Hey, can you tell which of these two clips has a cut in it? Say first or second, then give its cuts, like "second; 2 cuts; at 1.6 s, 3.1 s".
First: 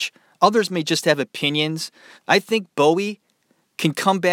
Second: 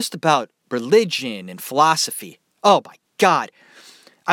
first; 1 cut; at 2.2 s